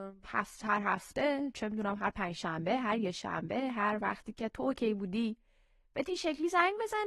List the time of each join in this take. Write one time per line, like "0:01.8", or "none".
none